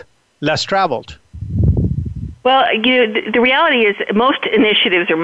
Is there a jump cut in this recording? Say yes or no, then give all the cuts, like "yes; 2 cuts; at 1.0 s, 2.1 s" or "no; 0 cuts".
no; 0 cuts